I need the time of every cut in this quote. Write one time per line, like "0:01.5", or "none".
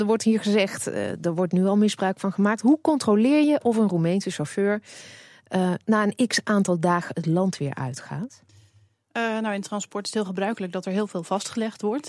none